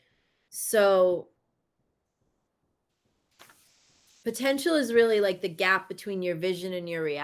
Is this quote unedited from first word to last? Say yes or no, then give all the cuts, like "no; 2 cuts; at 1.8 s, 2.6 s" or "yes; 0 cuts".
yes; 0 cuts